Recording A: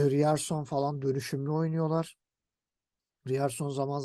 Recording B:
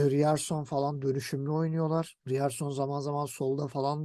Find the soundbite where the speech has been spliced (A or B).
B